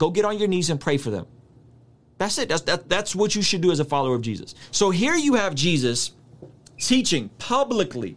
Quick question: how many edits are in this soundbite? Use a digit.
0